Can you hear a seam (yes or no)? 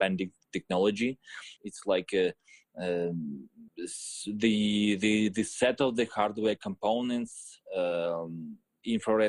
yes